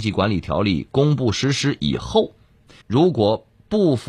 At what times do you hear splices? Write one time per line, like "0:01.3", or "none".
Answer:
0:02.8